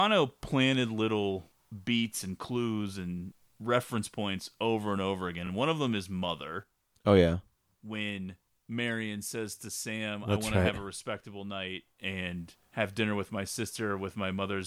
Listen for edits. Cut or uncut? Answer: uncut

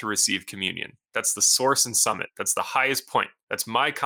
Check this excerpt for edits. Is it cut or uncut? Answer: uncut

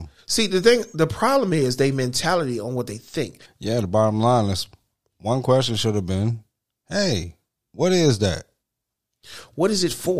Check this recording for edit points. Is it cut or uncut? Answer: cut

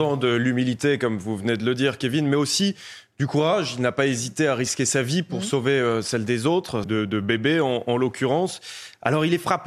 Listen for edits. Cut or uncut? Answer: cut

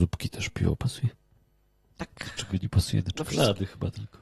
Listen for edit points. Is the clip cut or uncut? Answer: uncut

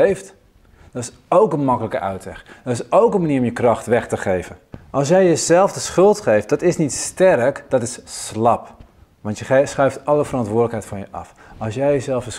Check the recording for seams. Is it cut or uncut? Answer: uncut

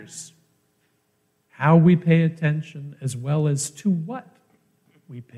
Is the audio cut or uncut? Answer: uncut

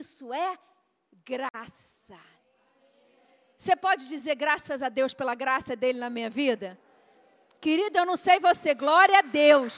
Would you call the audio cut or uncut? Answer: uncut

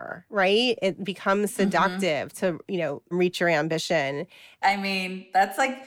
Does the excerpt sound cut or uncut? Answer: cut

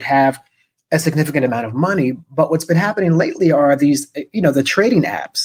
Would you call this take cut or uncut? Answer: uncut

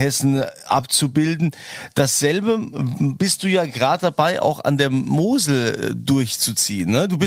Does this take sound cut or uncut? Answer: uncut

